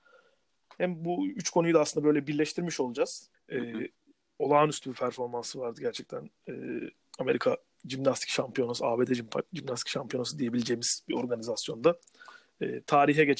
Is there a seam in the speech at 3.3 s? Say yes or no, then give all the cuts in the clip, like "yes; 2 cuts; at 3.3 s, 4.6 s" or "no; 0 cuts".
yes; 1 cut; at 3.3 s